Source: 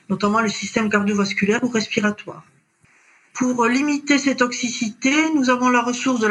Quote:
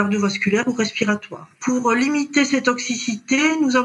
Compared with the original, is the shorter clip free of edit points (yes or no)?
no